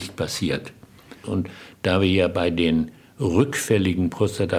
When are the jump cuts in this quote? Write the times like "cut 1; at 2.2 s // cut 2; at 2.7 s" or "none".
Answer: cut 1; at 1.2 s